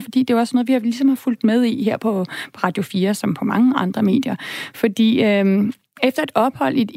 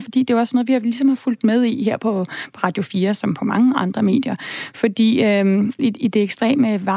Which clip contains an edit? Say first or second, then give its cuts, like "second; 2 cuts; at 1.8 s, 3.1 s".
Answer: second; 1 cut; at 5.8 s